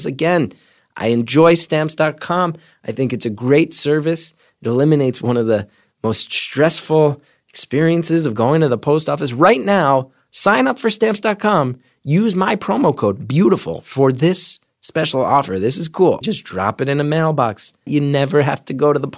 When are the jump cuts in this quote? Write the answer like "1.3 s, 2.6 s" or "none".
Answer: 16.2 s, 17.9 s